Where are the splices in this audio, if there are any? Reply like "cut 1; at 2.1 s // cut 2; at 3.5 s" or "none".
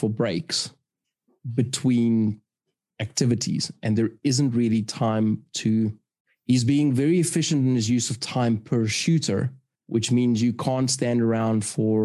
none